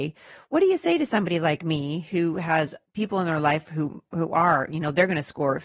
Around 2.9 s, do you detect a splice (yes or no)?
yes